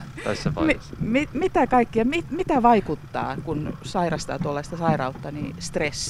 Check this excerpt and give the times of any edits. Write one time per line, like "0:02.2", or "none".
none

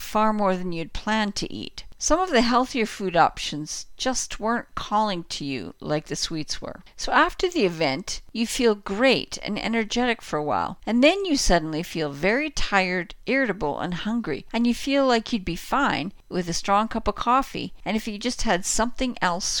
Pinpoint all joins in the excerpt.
none

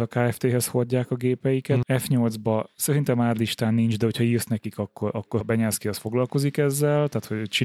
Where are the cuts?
0:01.8
0:05.4

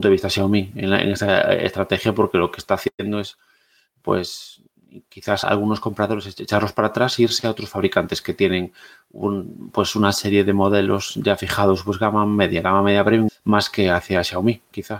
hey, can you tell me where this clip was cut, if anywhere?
0:05.4
0:13.3

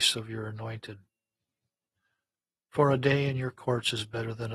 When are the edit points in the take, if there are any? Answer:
none

